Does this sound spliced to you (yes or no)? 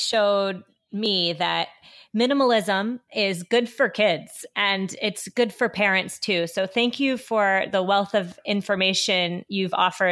no